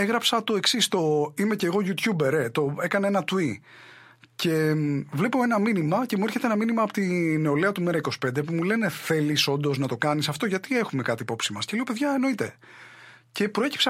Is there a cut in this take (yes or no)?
no